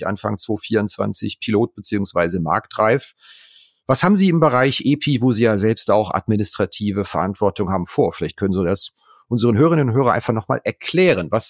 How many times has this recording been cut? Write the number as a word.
zero